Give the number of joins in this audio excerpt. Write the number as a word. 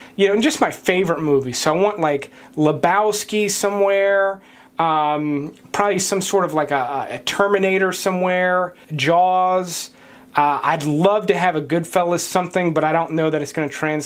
one